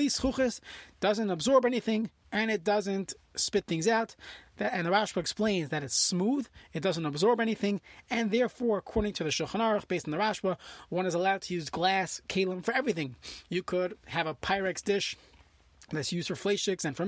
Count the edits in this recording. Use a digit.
1